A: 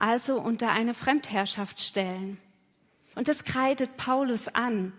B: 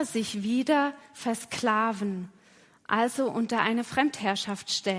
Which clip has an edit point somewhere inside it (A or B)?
A